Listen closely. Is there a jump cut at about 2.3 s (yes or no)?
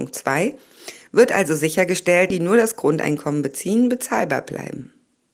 yes